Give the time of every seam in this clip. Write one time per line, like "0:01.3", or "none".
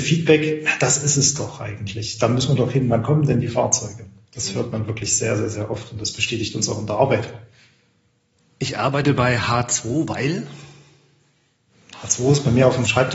none